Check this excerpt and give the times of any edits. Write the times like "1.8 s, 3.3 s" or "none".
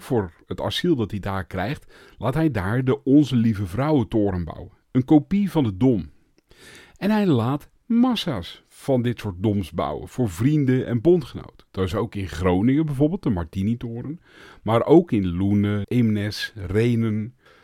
15.8 s